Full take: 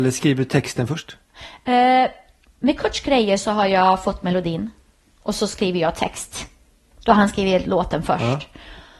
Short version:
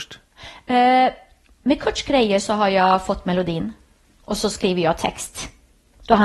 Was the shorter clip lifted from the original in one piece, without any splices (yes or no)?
yes